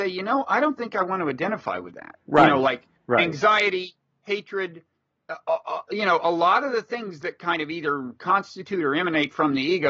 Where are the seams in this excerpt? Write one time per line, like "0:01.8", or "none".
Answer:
0:02.2